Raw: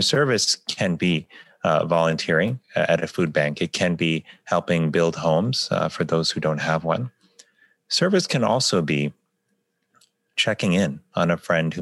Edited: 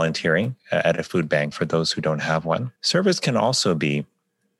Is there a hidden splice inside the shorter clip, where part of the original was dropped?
yes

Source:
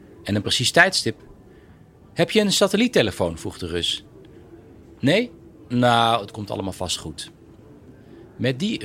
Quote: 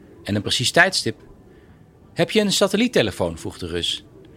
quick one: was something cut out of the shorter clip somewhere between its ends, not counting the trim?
no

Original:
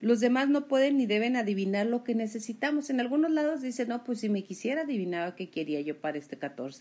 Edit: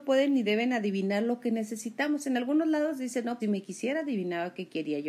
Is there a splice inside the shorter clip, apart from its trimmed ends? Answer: yes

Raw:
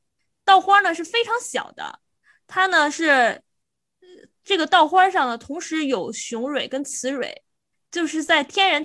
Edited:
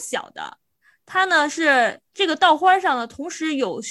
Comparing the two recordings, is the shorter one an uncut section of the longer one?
no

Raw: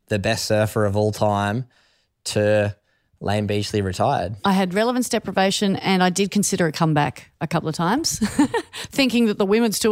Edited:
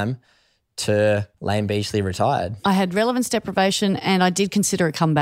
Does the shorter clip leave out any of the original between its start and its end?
yes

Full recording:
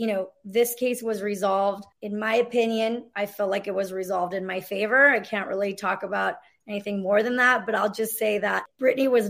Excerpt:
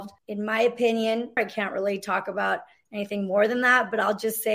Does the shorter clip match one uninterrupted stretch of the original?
no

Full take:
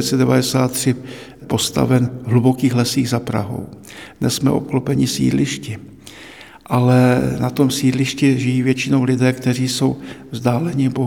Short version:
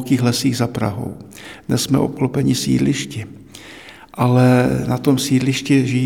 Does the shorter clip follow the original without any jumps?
yes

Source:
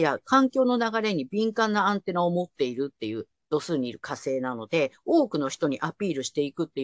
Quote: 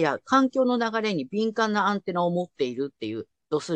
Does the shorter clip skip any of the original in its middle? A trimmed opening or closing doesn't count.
no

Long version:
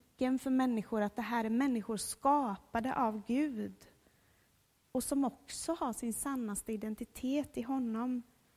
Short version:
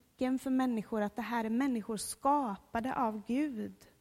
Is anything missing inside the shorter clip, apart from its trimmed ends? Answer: no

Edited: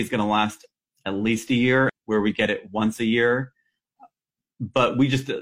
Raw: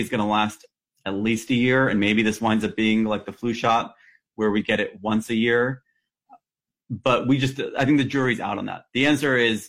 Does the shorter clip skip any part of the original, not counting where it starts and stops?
yes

